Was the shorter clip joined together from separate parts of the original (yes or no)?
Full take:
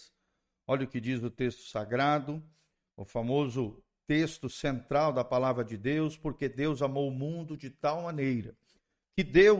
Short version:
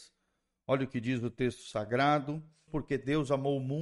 yes